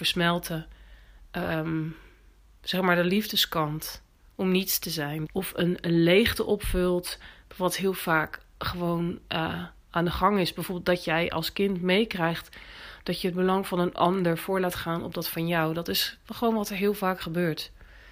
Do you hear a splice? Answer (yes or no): yes